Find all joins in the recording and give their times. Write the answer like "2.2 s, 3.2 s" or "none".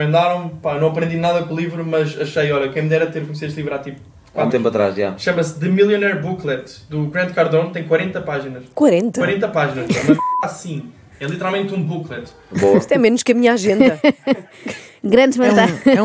4.5 s